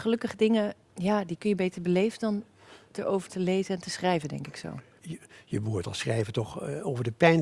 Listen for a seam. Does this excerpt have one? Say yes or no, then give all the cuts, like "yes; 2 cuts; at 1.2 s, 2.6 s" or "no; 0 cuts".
no; 0 cuts